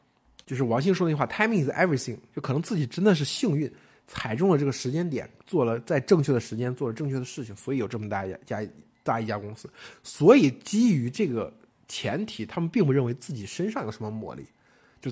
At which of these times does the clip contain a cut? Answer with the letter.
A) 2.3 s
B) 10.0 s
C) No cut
C